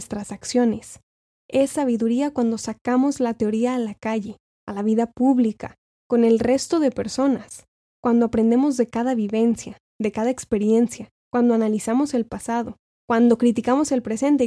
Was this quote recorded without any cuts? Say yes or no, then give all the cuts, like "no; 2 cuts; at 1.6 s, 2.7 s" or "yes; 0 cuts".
yes; 0 cuts